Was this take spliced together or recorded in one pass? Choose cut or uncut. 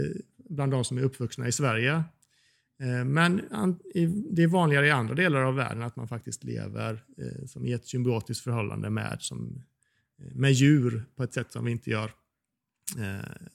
uncut